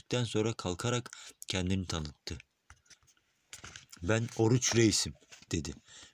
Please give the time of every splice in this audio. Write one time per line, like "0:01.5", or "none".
none